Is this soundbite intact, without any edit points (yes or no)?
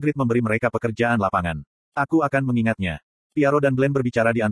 no